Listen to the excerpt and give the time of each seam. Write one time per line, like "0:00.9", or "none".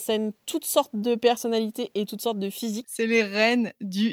0:02.8